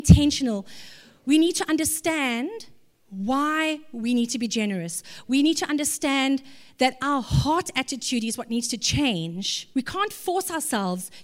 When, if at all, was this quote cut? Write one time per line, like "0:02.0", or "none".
0:09.7